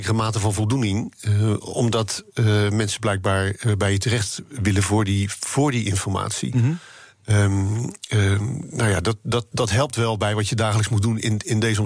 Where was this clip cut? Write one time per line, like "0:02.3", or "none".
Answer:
0:09.5